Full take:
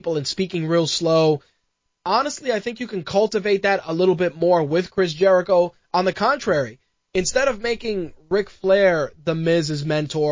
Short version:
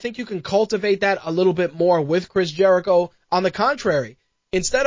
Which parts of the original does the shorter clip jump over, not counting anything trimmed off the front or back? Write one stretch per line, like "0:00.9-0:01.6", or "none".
none